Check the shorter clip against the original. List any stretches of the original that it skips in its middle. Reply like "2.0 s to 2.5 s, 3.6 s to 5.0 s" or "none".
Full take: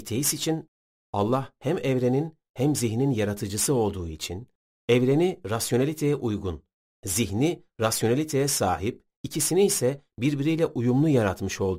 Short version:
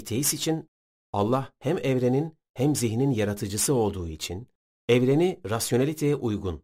none